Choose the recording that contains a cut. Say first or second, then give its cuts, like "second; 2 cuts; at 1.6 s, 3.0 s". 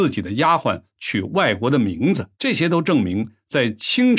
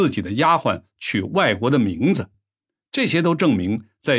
first; 1 cut; at 2.3 s